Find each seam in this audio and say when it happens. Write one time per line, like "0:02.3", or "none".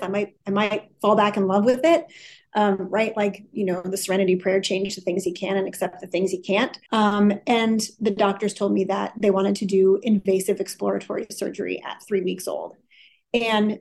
0:06.9